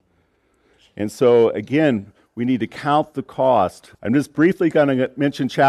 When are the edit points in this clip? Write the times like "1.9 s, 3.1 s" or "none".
3.9 s